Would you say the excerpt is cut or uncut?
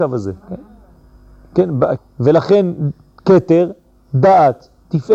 cut